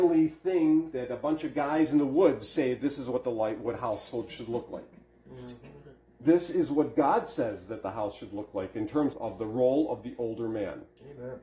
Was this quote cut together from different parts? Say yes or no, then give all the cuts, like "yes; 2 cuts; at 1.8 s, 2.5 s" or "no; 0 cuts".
yes; 1 cut; at 9.1 s